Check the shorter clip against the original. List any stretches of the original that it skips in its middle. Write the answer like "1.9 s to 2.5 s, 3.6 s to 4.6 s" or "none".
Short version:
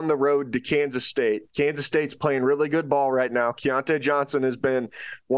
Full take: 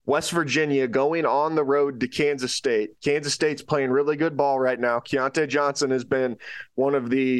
none